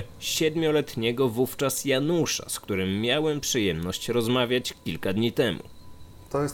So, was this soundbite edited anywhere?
no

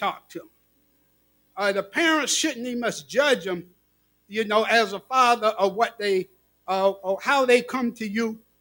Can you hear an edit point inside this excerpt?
yes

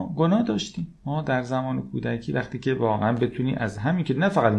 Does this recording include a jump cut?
yes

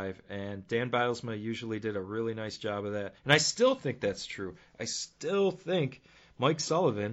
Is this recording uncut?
no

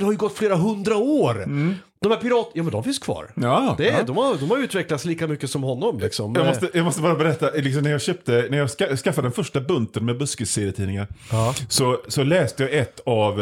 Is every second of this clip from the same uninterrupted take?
yes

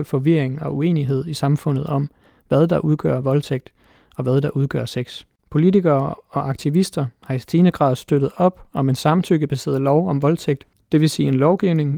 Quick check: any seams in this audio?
yes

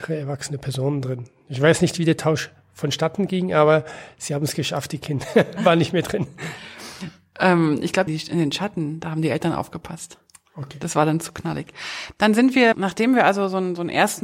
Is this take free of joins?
no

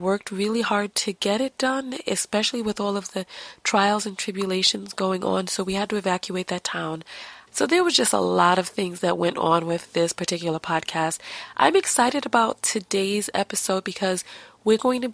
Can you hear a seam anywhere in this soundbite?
yes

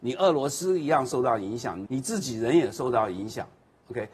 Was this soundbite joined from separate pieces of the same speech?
yes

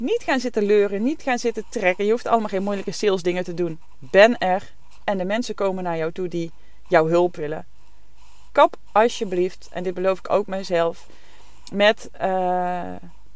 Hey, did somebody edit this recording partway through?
no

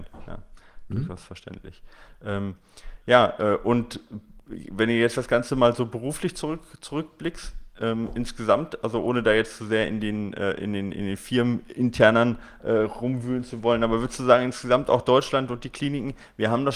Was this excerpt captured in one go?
yes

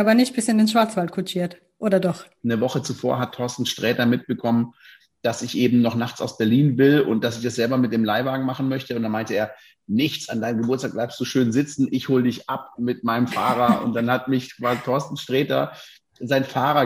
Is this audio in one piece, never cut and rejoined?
no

